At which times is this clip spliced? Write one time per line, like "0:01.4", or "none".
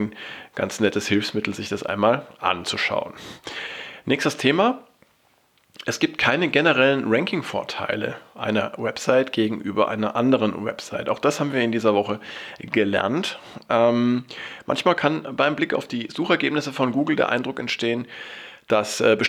none